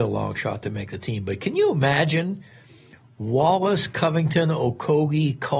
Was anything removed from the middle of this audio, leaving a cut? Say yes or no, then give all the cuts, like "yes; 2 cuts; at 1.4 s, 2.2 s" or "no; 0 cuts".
no; 0 cuts